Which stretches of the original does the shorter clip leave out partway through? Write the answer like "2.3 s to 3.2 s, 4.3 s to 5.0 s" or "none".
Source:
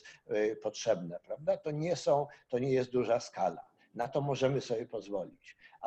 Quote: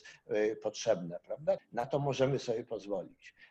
1.6 s to 3.8 s